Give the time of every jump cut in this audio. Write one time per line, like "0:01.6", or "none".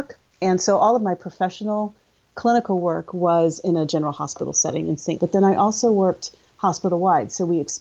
0:05.2